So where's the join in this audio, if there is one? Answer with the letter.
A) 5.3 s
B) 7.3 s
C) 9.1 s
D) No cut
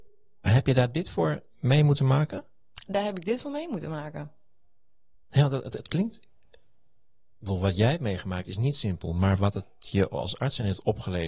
A